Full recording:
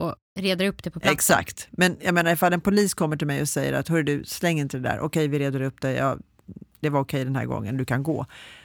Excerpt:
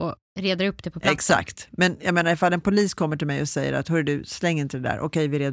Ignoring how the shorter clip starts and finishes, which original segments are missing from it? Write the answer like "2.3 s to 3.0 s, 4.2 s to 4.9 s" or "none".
none